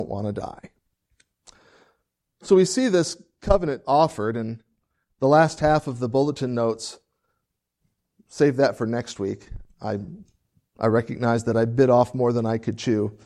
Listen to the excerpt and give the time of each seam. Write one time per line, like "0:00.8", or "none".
none